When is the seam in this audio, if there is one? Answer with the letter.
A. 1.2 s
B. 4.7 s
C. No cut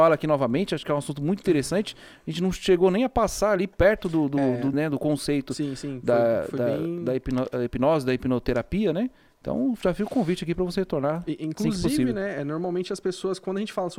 B